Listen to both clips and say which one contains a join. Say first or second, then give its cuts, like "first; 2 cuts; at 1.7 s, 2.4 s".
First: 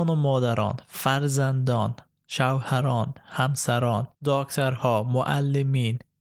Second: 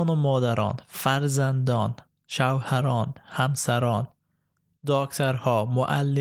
first; 1 cut; at 4.1 s